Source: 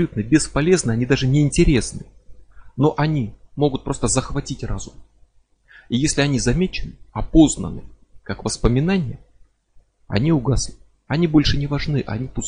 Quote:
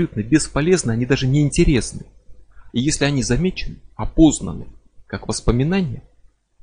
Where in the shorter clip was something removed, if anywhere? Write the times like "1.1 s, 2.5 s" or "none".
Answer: 2.7 s